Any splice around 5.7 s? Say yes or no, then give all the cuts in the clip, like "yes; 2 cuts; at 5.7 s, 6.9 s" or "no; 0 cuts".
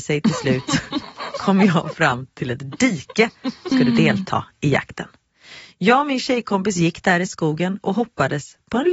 no; 1 cut; at 3.7 s